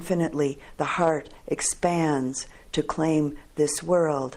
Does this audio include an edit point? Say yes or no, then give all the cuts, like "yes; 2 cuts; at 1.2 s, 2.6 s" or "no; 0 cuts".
no; 0 cuts